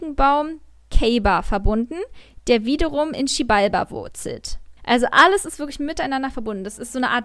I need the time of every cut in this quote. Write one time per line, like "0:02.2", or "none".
0:04.8